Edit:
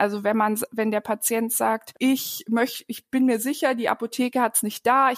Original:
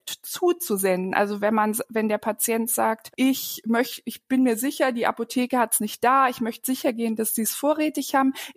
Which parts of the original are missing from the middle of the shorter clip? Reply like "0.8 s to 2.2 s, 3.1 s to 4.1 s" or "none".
none